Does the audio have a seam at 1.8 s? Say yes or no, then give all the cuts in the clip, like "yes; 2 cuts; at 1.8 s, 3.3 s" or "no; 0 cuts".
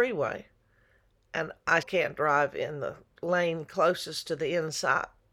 yes; 1 cut; at 1.8 s